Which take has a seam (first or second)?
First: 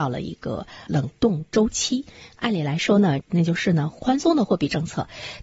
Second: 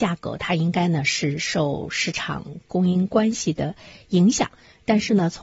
first